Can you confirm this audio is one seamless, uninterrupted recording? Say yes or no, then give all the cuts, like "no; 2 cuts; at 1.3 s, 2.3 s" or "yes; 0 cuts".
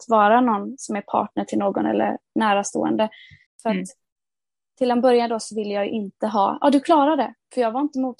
no; 1 cut; at 3.5 s